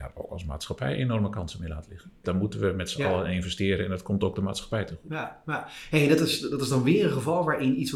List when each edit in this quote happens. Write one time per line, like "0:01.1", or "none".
0:02.2